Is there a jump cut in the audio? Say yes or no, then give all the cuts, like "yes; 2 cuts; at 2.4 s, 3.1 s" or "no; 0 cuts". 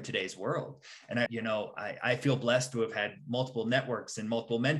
yes; 1 cut; at 1.3 s